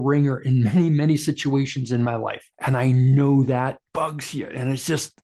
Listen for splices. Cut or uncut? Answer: cut